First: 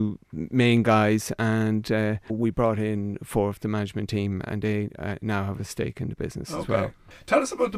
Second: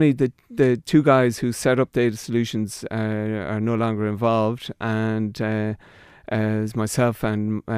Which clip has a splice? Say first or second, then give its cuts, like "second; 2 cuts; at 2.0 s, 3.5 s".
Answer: first; 1 cut; at 2.3 s